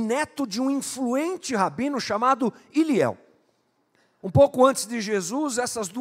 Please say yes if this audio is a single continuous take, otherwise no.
yes